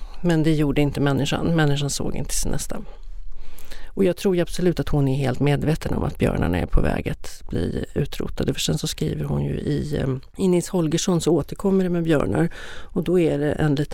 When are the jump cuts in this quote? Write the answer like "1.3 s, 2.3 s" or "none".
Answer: none